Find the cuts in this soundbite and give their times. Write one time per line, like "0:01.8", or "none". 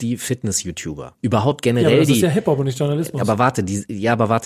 none

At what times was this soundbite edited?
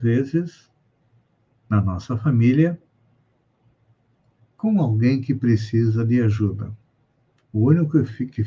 0:07.4

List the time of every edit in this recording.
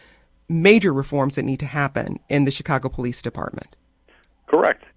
none

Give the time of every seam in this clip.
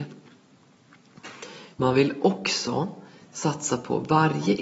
0:01.7

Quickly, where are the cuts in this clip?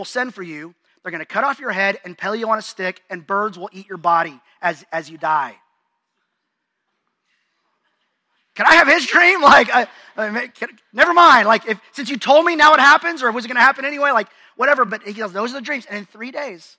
none

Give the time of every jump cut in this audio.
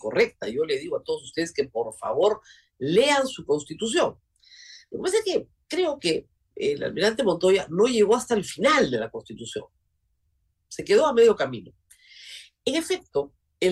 none

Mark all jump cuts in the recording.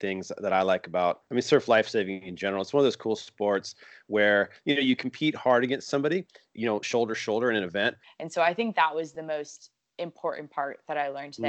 0:08.0

